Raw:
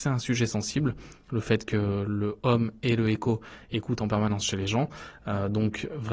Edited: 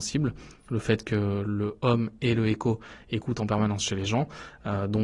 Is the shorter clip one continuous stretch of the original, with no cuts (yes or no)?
yes